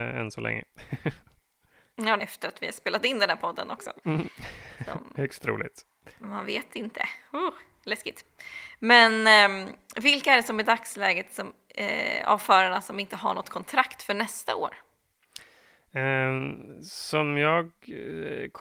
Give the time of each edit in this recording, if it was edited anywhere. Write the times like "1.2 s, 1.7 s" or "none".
2.2 s